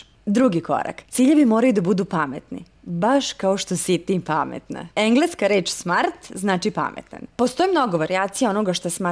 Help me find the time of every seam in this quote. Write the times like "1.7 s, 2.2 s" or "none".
4.9 s